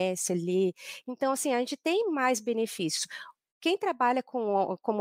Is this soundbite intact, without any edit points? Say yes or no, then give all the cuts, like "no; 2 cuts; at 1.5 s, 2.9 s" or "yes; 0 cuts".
yes; 0 cuts